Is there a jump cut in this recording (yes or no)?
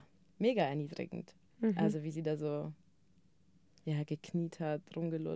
no